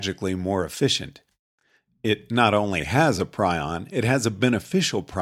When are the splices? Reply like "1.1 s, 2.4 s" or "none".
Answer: none